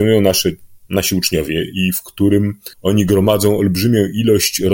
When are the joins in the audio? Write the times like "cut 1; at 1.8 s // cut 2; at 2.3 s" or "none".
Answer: cut 1; at 2.7 s